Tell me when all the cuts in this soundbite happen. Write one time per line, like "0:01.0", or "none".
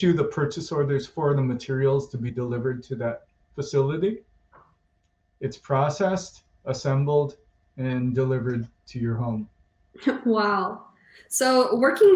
none